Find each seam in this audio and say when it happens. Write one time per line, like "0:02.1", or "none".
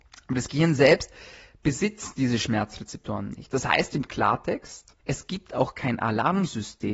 0:05.0